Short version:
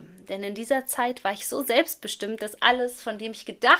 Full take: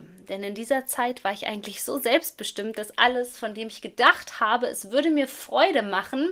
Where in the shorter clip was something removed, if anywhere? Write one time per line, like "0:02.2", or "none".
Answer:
0:01.4